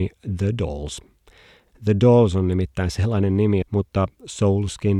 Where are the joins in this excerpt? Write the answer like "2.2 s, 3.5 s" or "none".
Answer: 1.7 s, 3.6 s